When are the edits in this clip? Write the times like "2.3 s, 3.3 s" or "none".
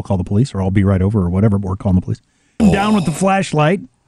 2.6 s